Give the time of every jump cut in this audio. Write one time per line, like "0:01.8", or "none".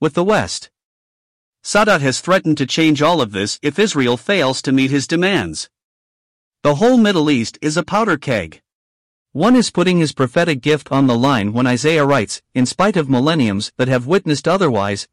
0:09.2